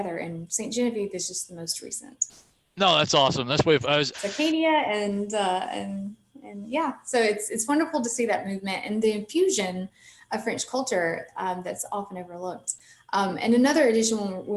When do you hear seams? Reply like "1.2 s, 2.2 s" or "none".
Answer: 4.1 s